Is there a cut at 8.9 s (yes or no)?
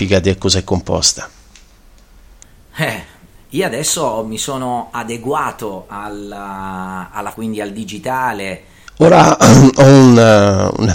yes